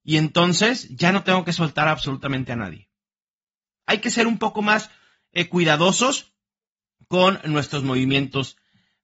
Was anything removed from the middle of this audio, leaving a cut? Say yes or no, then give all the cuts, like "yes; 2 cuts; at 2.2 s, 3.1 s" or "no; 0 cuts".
no; 0 cuts